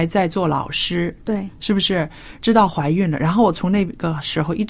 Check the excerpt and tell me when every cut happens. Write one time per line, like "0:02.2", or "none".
0:02.4